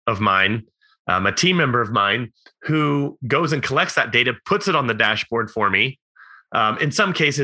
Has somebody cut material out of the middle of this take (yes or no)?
no